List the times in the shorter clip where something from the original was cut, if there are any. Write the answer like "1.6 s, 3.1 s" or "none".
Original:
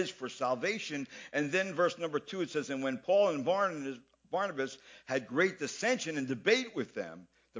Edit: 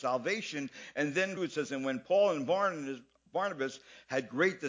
1.4 s